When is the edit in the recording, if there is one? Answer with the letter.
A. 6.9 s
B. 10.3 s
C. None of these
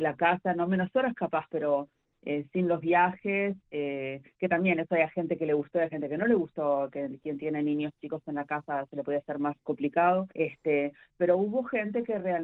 B